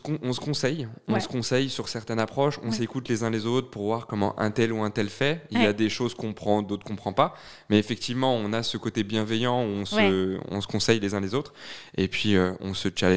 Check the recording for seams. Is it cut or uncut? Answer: uncut